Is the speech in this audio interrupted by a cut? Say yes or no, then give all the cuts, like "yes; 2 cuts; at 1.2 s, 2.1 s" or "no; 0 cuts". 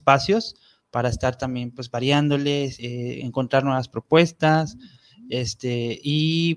no; 0 cuts